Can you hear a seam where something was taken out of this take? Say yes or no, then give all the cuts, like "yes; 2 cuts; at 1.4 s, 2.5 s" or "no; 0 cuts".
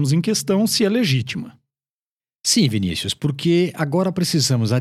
no; 0 cuts